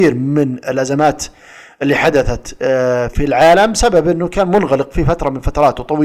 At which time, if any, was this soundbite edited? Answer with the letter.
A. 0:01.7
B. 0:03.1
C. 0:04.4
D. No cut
B